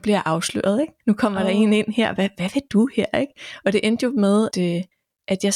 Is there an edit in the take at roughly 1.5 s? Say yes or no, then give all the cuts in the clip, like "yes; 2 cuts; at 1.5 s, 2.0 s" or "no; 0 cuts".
no; 1 cut; at 4.5 s